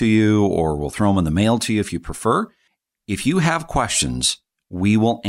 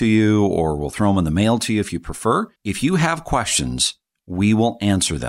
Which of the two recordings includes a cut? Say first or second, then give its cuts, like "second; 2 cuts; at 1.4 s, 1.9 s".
second; 1 cut; at 2.6 s